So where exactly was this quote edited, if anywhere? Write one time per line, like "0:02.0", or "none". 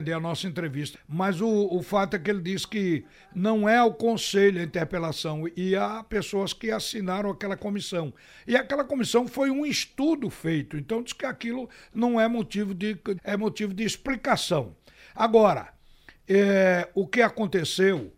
0:00.9
0:13.2